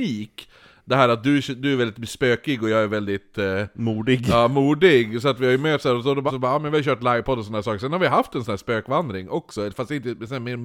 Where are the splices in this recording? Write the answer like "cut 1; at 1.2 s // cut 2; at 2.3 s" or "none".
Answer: cut 1; at 6.3 s